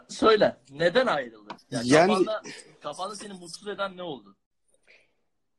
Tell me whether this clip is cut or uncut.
cut